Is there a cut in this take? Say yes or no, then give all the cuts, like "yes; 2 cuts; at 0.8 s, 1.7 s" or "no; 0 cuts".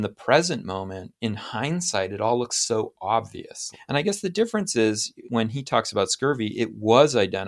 yes; 2 cuts; at 3.7 s, 5.2 s